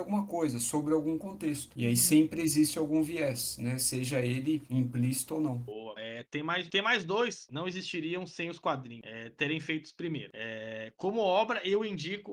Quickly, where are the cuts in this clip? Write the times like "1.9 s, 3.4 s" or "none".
6.0 s, 7.5 s